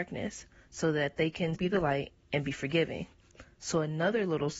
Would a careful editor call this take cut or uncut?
cut